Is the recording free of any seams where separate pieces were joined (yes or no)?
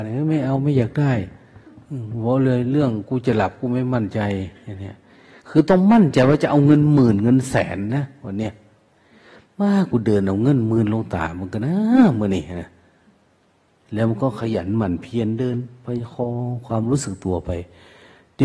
yes